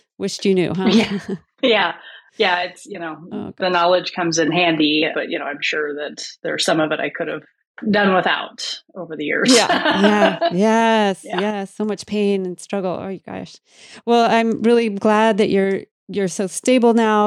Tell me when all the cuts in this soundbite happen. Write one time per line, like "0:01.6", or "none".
none